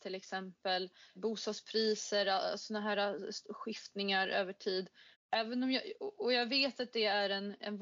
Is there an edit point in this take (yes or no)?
yes